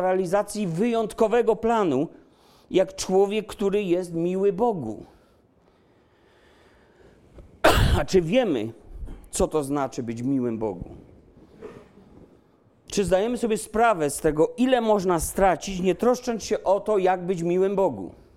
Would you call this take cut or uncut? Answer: uncut